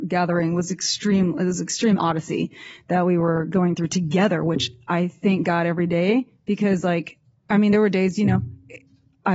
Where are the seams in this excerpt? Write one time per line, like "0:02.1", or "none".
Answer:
none